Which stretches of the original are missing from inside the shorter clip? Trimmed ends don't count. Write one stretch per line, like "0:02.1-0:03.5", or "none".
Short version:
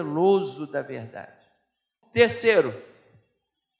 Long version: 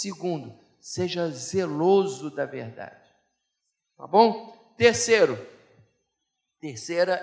0:03.7-0:04.7

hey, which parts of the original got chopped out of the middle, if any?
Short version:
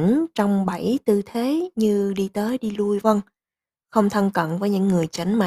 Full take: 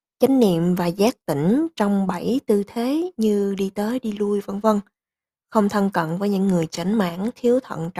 0:04.4-0:04.6

